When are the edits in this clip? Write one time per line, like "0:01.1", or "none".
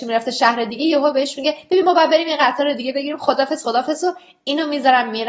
0:03.6